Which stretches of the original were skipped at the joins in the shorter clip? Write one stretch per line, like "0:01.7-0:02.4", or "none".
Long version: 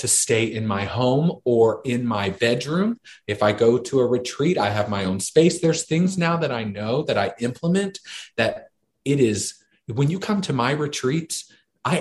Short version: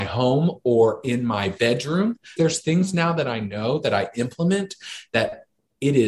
0:03.2-0:05.6